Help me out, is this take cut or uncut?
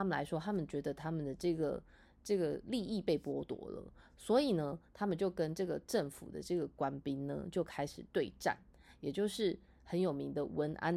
uncut